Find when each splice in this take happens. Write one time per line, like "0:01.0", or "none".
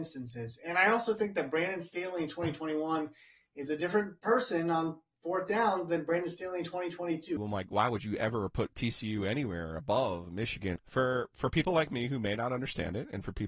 0:07.4
0:10.8